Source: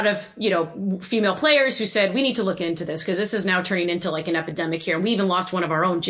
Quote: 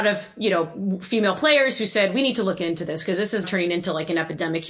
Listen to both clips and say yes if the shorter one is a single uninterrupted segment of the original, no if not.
no